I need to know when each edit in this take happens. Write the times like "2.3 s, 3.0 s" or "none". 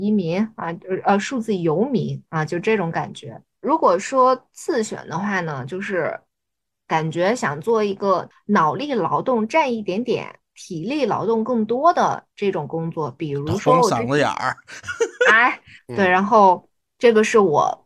3.6 s, 15.8 s